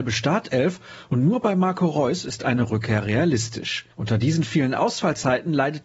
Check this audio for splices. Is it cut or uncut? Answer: cut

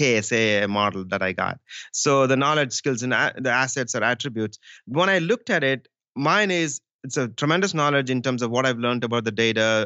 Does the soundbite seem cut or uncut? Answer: uncut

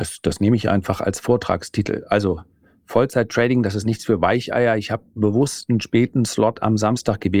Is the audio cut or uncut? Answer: uncut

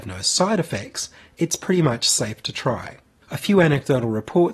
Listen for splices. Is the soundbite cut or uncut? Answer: cut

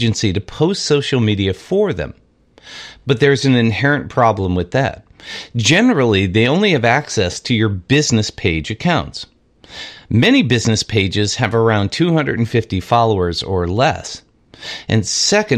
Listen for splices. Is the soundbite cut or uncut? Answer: uncut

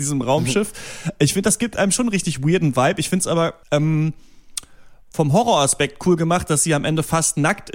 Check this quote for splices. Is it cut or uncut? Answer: cut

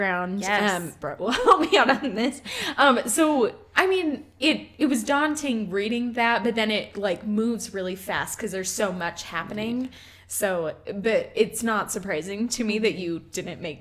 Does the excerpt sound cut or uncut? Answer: cut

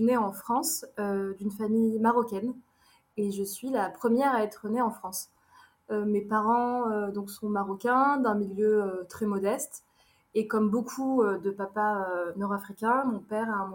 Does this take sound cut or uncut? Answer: uncut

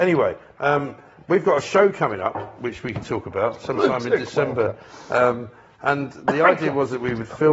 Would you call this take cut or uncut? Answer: uncut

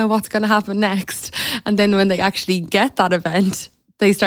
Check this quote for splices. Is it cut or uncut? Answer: uncut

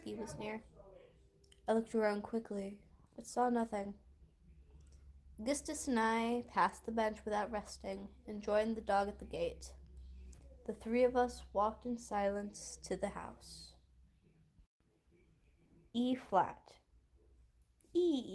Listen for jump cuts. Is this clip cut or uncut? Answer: uncut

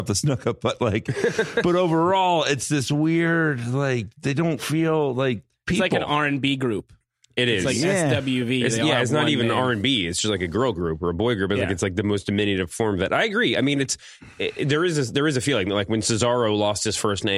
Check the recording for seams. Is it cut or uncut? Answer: uncut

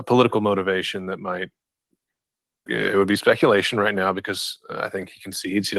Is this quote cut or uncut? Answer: cut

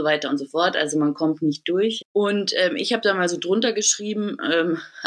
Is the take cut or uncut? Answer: cut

